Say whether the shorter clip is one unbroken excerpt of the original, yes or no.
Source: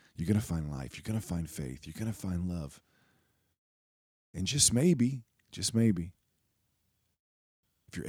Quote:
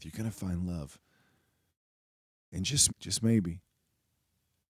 no